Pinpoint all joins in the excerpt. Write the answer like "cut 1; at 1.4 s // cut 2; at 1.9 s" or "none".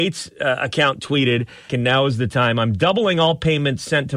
cut 1; at 1.7 s

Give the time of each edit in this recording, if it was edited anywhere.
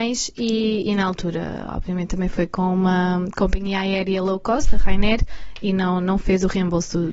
none

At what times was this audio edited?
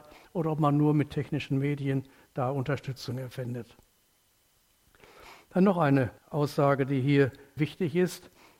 cut 1; at 6.2 s // cut 2; at 7.6 s

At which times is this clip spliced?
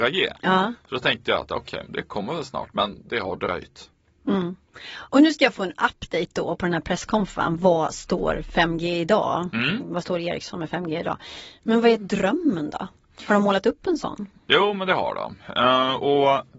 cut 1; at 1.8 s

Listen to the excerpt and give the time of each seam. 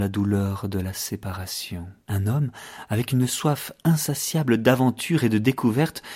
cut 1; at 2.0 s

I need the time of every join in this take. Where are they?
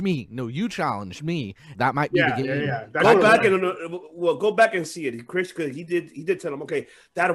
cut 1; at 1.7 s

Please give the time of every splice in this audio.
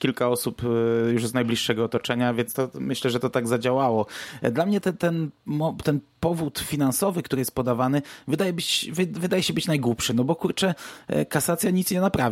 none

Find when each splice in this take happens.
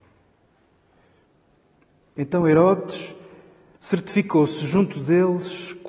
cut 1; at 3.8 s

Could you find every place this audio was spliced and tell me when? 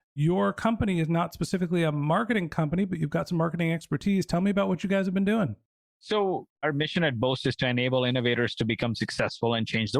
none

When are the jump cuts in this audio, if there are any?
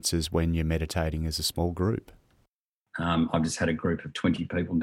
cut 1; at 2.9 s

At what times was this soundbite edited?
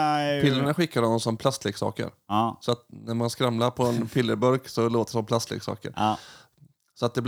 cut 1; at 1.4 s

